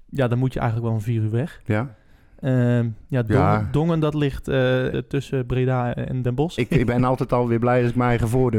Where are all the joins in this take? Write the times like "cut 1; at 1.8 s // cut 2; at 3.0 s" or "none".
cut 1; at 4.9 s // cut 2; at 6.6 s